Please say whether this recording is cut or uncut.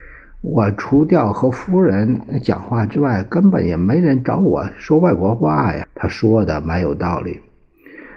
cut